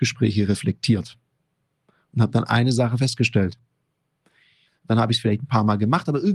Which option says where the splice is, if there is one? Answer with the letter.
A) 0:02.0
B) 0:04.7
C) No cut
B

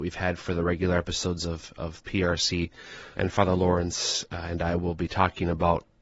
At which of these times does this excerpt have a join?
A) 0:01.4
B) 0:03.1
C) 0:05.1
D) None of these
B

